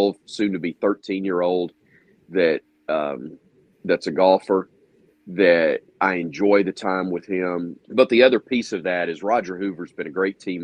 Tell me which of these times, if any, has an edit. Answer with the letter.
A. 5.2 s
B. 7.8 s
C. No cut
B